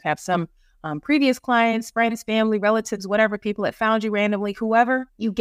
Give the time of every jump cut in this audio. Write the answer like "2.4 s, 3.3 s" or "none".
none